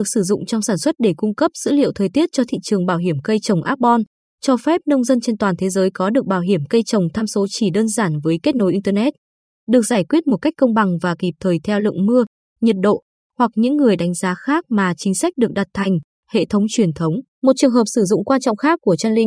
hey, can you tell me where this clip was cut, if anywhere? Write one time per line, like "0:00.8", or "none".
0:16.1
0:17.3

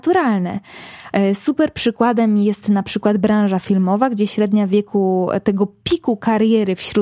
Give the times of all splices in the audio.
0:01.1

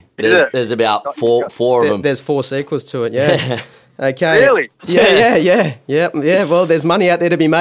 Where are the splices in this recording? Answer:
none

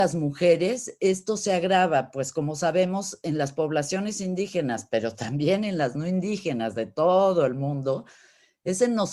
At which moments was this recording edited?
none

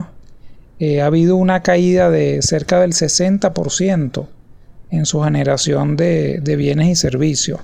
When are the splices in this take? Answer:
none

